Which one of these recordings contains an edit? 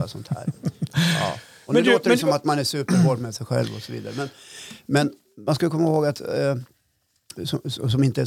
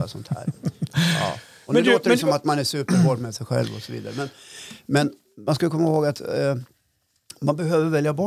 first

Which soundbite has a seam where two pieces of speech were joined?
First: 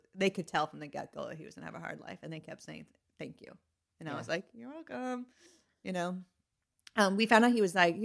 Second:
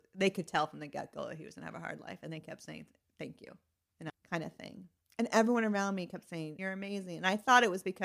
second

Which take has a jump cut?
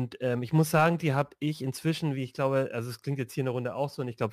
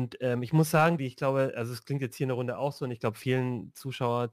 second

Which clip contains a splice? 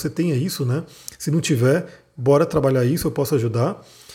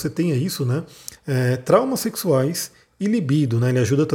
second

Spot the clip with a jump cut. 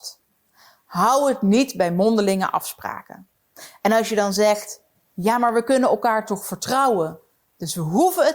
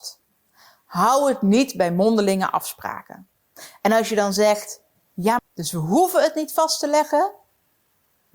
second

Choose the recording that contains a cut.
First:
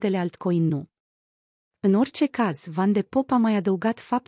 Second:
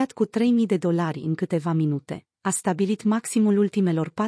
second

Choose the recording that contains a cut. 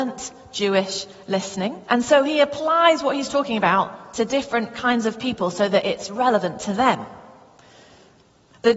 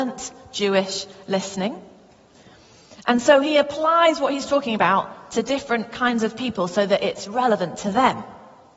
first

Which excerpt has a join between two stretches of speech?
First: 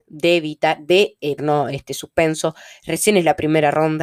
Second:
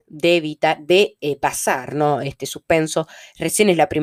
first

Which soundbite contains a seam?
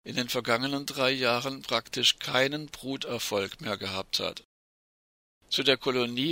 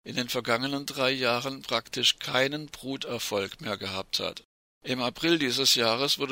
second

